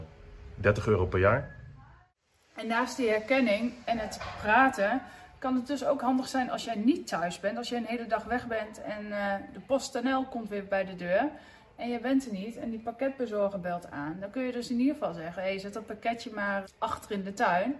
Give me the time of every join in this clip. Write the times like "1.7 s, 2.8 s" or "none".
16.6 s